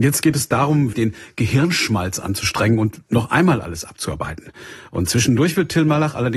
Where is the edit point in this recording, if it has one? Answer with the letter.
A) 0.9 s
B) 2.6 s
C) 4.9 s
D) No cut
A